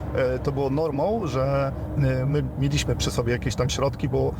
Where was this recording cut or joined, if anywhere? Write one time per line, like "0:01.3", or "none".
none